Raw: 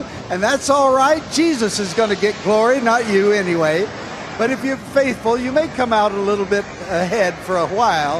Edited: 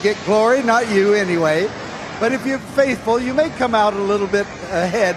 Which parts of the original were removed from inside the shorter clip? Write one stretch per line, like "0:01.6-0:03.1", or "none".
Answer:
none